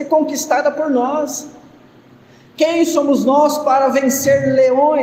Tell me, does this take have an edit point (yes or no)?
no